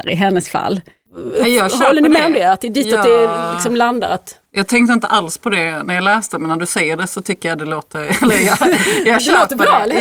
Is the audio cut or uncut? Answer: uncut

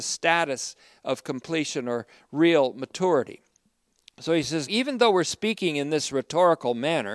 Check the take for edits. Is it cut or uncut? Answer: cut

